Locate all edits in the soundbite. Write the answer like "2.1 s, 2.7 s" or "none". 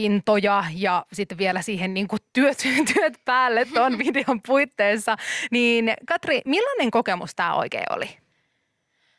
none

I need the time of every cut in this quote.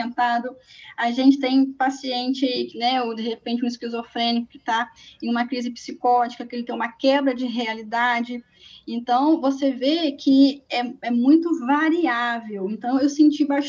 none

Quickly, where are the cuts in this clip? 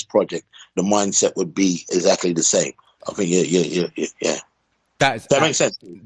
3.0 s

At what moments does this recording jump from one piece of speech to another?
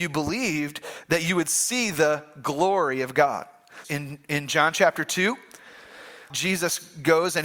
3.8 s, 6.3 s

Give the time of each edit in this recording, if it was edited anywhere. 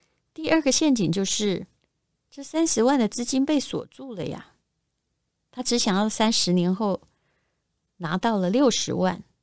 none

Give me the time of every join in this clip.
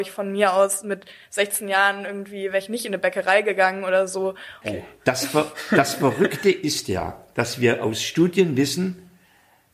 4.6 s

